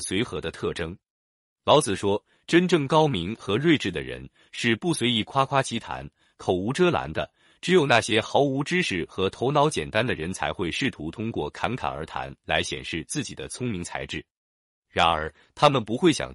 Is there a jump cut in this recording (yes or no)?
no